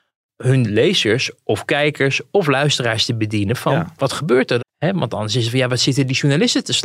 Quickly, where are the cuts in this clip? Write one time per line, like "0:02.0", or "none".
0:04.6